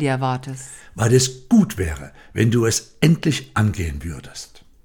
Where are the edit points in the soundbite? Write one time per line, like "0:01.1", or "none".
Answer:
none